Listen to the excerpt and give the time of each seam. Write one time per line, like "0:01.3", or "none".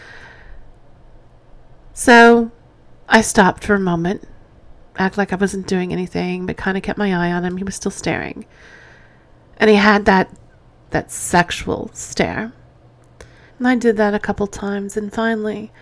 0:10.9
0:13.5